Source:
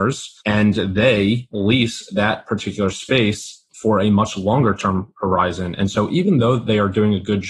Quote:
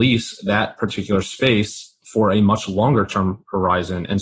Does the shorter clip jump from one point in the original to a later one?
no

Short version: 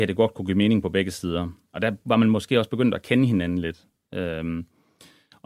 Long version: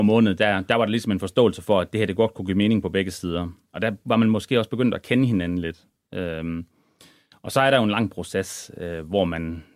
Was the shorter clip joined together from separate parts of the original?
no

